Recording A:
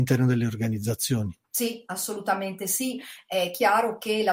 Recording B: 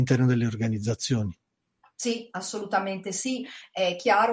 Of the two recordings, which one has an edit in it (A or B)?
A